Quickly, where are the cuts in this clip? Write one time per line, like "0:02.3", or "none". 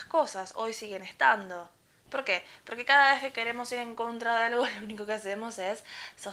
none